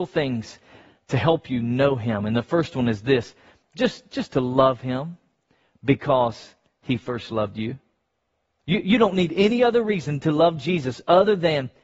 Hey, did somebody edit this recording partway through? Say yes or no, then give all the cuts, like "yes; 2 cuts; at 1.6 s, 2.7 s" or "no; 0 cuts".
yes; 1 cut; at 8.6 s